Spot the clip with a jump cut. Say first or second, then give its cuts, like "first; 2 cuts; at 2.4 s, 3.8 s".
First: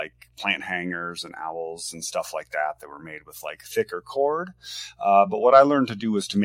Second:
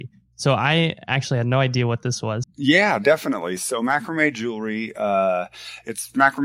second; 1 cut; at 2.4 s